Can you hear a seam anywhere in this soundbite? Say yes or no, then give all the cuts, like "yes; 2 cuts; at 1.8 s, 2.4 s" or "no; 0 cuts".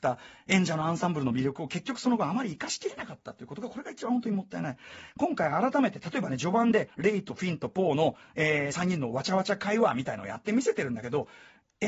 no; 0 cuts